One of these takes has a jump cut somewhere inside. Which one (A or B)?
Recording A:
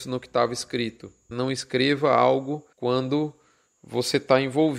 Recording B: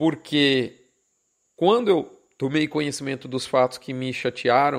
A